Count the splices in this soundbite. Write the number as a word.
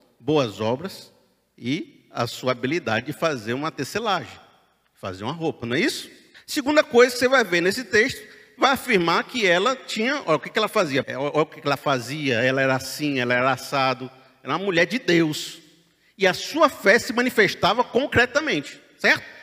two